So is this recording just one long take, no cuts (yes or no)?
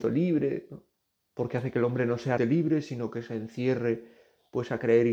no